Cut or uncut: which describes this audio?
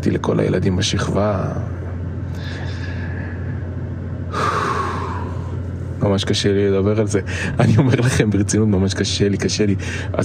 uncut